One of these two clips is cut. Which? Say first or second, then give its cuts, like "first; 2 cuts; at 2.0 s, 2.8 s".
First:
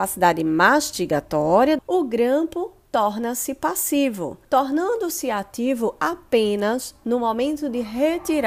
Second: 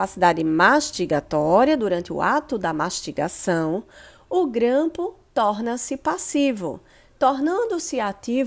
first; 2 cuts; at 1.8 s, 4.4 s